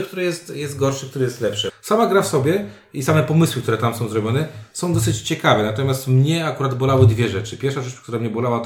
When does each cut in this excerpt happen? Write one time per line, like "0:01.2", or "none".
0:01.7